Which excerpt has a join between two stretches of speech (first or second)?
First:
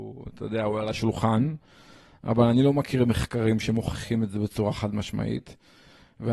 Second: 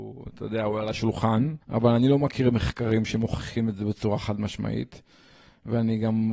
second